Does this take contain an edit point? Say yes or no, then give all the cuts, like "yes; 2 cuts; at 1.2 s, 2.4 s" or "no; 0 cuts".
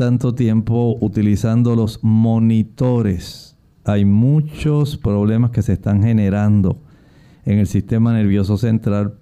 no; 0 cuts